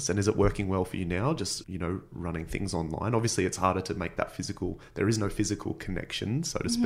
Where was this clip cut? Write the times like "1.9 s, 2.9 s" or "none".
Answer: 1.6 s

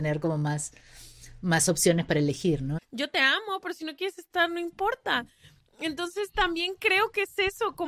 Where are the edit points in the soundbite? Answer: 2.8 s

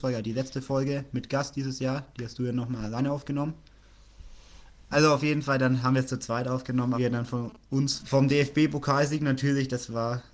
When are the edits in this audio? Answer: 4.9 s, 6.9 s, 8.0 s

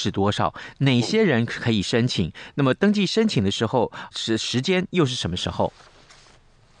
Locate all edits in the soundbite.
4.1 s

